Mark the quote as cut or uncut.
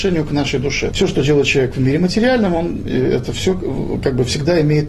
cut